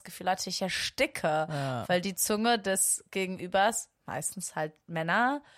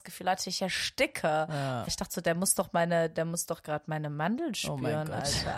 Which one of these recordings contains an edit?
second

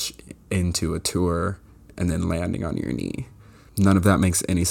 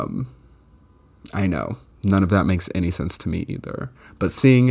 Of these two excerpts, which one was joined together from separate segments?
first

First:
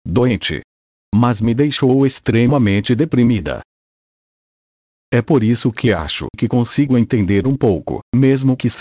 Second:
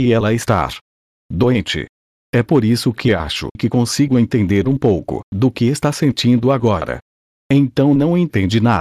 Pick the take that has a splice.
second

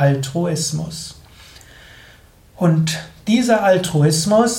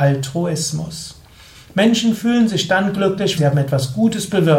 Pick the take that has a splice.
second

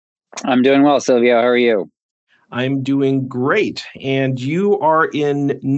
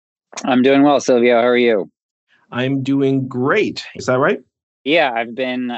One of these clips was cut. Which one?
second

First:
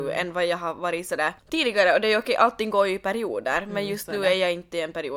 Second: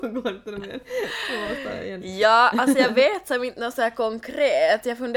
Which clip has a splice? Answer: first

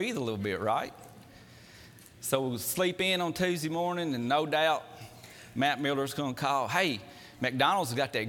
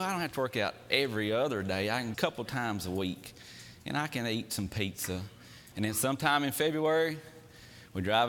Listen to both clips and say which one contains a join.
second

